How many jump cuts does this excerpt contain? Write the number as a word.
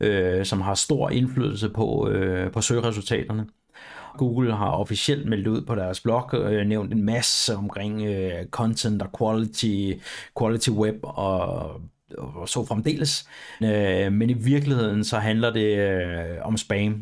two